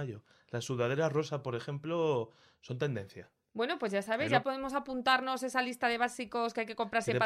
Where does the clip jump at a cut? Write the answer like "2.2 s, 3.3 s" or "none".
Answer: 4.4 s